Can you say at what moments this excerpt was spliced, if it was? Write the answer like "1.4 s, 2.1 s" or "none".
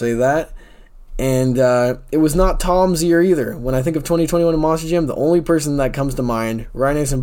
none